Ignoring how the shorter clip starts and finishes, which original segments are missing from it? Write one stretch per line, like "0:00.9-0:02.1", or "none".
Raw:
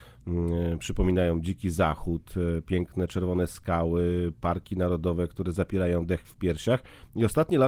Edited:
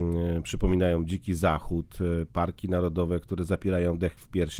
0:02.6-0:04.4